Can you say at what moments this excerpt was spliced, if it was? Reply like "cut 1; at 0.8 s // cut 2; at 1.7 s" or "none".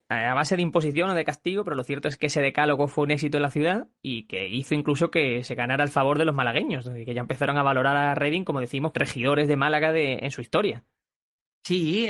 cut 1; at 8.9 s